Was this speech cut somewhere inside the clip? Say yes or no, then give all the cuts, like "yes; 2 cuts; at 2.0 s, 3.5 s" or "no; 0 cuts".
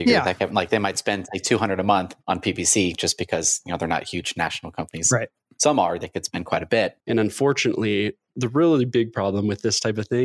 yes; 1 cut; at 7.0 s